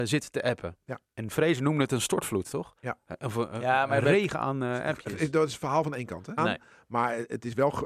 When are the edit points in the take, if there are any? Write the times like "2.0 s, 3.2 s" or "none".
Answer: 2.8 s, 6.4 s